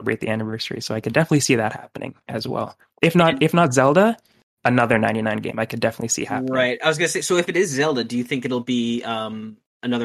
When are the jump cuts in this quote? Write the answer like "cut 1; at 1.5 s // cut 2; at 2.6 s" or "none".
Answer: none